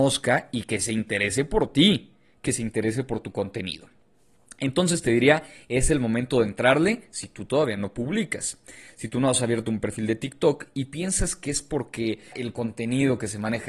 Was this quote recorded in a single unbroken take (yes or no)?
no